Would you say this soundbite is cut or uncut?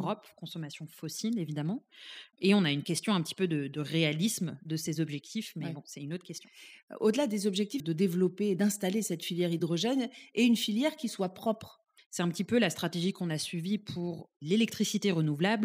cut